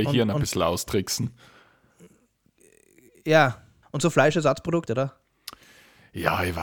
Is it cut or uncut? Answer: cut